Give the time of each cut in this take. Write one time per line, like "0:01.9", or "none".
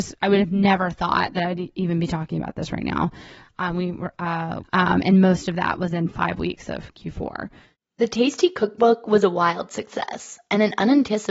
0:03.4
0:04.6